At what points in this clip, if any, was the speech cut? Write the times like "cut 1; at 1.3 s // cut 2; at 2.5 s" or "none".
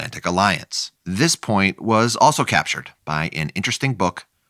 cut 1; at 1.0 s